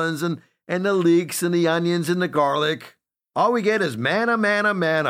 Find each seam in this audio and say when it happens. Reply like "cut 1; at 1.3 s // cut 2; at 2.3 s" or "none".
cut 1; at 3.3 s